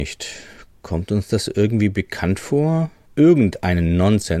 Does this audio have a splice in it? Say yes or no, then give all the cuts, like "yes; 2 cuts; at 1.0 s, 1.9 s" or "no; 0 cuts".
yes; 1 cut; at 3.1 s